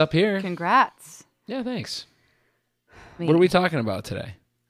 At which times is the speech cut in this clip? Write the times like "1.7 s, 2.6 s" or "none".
3.2 s